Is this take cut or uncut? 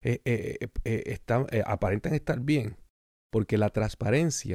cut